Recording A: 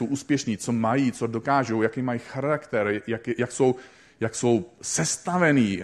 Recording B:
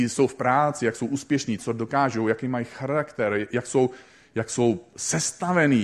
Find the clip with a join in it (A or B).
B